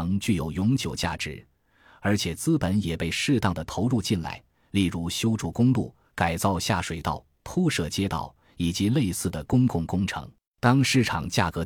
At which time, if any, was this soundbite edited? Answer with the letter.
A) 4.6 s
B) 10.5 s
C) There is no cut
B